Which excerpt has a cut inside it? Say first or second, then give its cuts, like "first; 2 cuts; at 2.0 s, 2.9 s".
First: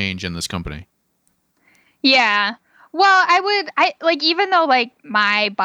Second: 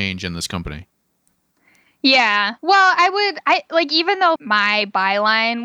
second; 2 cuts; at 2.6 s, 4.4 s